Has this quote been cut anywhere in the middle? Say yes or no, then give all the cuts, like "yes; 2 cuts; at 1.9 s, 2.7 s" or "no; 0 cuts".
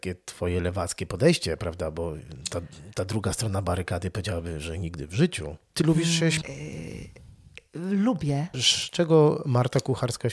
yes; 2 cuts; at 6.4 s, 8.5 s